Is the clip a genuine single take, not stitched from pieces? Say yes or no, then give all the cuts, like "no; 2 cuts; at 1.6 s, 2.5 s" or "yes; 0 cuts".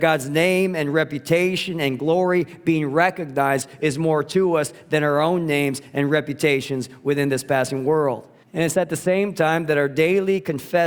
no; 1 cut; at 8.4 s